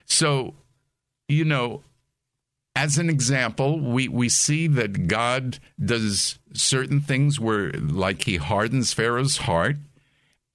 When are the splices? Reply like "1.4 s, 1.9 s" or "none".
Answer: none